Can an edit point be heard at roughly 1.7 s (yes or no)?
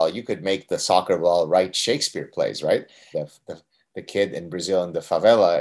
no